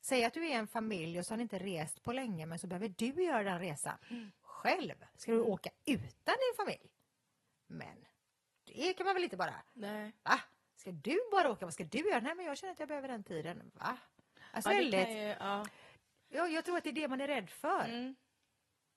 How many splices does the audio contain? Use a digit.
1